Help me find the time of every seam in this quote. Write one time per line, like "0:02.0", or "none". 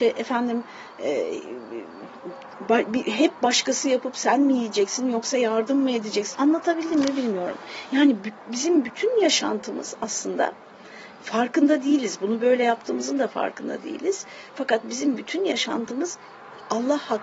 0:06.3